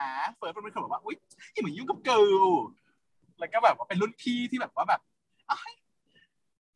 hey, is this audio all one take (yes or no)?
yes